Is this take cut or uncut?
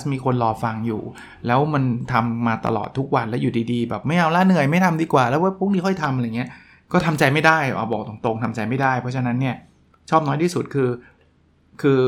uncut